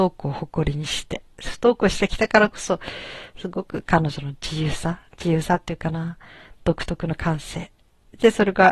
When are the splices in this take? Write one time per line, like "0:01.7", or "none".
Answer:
none